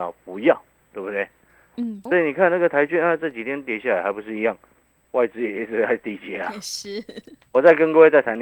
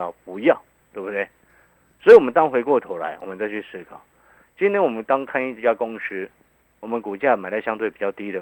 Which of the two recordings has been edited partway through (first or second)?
first